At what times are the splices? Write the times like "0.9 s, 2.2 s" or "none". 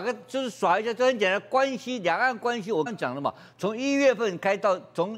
2.9 s